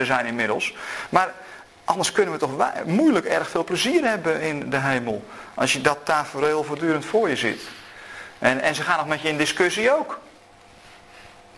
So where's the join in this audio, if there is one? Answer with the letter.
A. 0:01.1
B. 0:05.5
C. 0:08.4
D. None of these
D